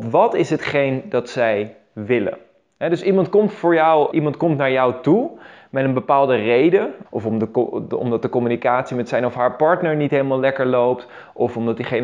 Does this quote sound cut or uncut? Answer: cut